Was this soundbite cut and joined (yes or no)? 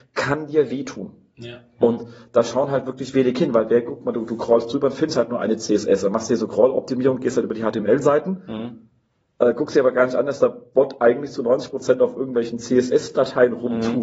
no